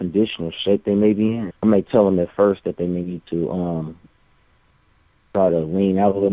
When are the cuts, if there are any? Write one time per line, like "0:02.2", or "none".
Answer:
0:01.5